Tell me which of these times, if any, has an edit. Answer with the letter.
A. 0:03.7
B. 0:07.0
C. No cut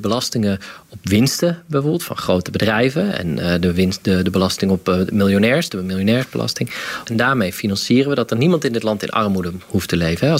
B